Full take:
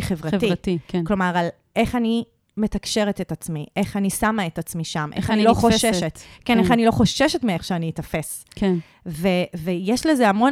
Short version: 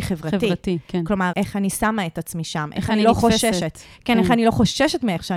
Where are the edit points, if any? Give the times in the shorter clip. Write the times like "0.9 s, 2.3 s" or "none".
1.3 s